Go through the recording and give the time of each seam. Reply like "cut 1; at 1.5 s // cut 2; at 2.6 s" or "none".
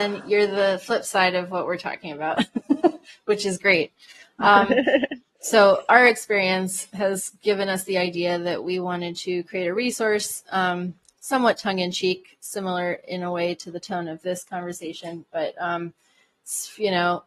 none